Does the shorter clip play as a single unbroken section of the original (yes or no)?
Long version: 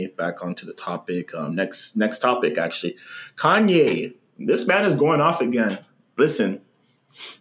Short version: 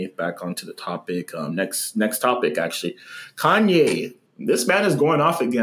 yes